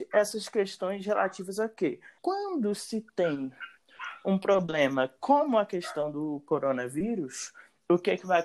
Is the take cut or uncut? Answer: cut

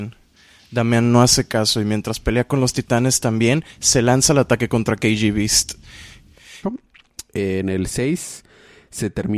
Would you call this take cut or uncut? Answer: cut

